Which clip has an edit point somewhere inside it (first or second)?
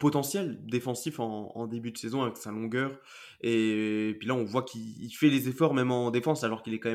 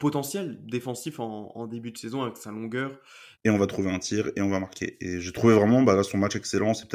second